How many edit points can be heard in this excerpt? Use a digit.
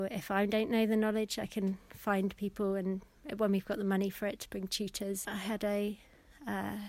1